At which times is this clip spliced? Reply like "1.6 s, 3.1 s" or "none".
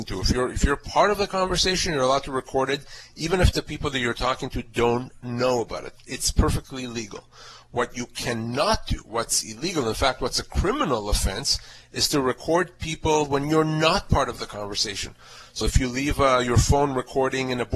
15.6 s